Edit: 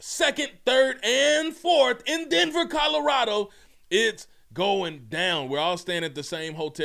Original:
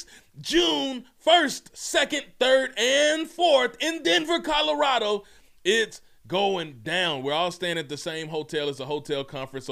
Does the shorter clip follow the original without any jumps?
yes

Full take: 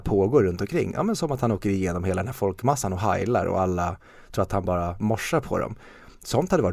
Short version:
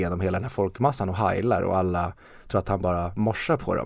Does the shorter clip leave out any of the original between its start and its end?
no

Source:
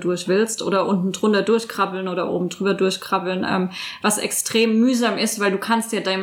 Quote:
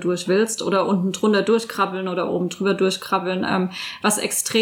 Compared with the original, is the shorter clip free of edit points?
yes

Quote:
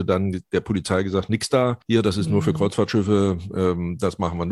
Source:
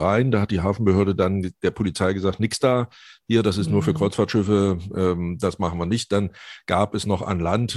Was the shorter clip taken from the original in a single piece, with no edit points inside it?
no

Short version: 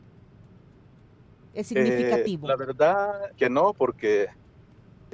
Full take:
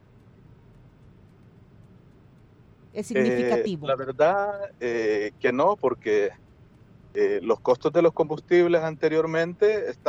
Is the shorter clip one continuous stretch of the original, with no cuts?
no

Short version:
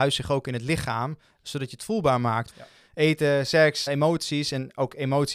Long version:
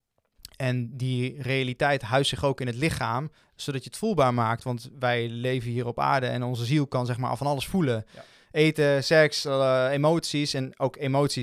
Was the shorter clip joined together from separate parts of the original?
yes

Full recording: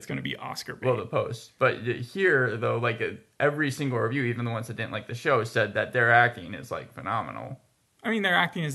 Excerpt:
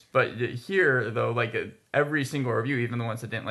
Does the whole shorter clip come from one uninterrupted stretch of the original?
yes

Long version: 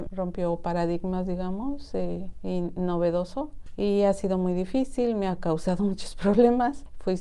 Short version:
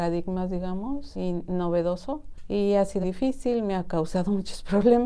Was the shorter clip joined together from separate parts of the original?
yes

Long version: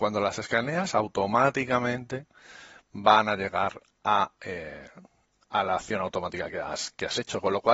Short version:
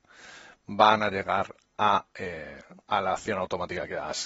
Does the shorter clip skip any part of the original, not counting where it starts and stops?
yes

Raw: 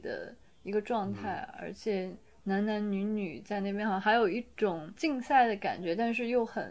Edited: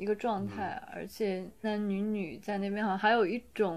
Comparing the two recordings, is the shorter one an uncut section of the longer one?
no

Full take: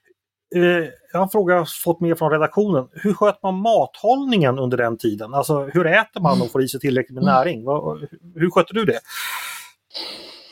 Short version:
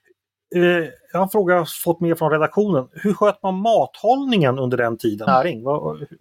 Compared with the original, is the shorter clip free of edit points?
no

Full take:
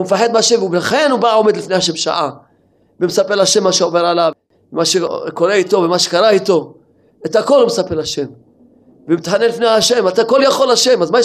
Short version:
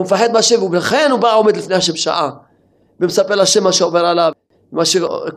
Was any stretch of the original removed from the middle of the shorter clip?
no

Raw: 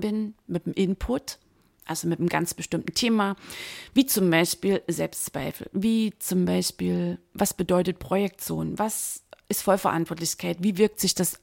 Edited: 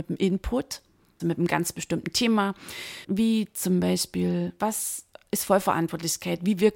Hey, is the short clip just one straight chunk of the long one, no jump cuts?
no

